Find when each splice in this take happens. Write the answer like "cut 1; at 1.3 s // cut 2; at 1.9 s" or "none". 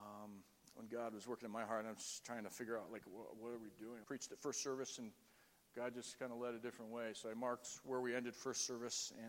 cut 1; at 4.0 s